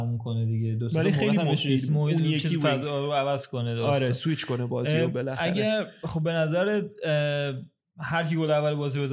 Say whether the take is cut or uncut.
cut